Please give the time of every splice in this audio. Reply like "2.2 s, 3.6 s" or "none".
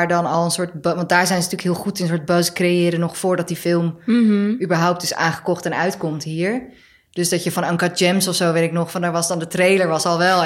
none